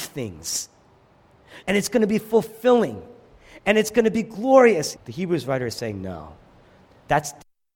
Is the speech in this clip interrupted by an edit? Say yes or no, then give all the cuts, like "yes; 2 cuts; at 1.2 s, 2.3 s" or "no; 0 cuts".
yes; 2 cuts; at 1.6 s, 5.0 s